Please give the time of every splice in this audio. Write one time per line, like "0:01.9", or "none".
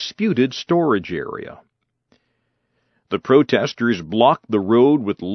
none